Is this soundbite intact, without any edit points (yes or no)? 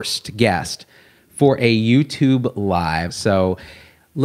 no